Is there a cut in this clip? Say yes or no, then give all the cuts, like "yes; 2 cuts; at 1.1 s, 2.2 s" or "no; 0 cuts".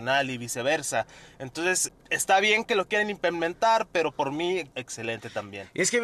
yes; 2 cuts; at 1.9 s, 4.7 s